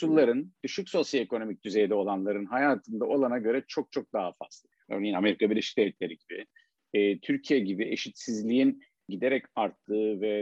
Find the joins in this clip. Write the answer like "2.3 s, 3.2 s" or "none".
4.9 s